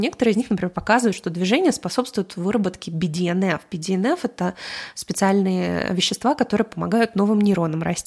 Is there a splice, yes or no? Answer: no